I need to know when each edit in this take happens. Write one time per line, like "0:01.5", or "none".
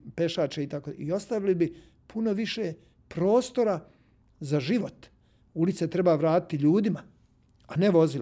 none